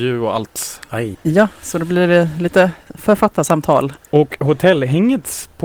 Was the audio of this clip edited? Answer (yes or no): yes